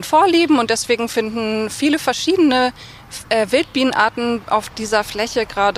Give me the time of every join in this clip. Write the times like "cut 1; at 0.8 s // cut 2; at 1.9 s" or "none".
none